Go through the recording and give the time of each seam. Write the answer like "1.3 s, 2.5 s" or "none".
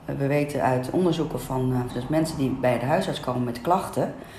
1.9 s